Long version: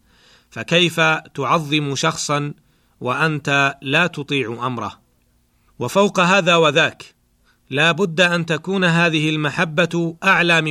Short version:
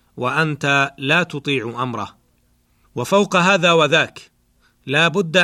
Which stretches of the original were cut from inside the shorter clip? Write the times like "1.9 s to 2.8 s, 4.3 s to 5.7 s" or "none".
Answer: none